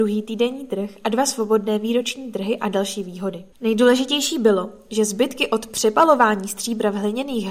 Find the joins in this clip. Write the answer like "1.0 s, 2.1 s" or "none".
3.5 s